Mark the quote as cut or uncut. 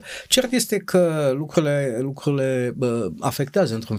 uncut